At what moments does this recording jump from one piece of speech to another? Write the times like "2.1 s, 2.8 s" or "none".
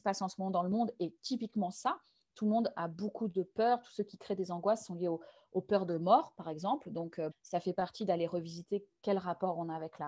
7.3 s